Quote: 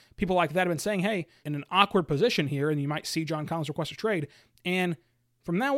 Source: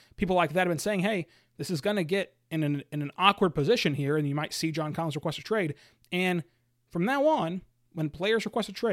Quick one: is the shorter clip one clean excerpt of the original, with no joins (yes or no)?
no